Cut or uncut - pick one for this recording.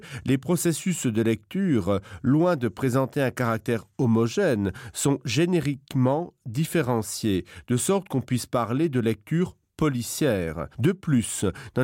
cut